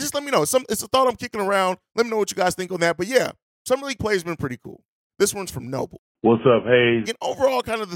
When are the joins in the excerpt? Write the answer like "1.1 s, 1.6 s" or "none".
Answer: 5.1 s, 7.0 s